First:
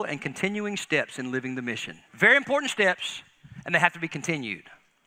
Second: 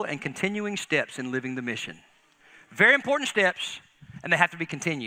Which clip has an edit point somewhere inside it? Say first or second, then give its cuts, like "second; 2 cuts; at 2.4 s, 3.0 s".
first; 1 cut; at 2.1 s